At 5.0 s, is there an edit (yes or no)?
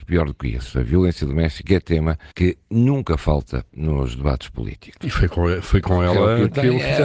yes